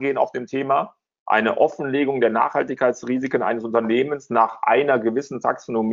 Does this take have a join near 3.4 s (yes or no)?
no